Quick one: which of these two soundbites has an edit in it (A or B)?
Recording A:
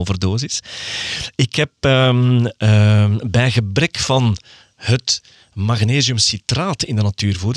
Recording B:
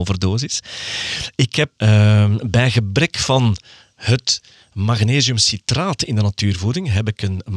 B